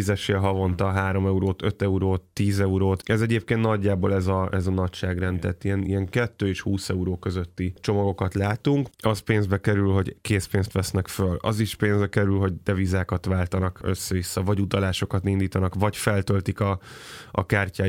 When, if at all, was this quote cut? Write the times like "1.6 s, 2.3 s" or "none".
8.9 s